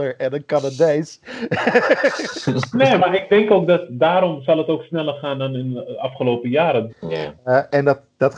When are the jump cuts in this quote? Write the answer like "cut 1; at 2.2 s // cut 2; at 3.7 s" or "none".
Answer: cut 1; at 3.0 s // cut 2; at 6.9 s